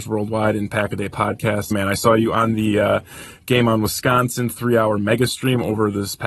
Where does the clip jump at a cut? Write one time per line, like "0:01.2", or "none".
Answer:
0:01.7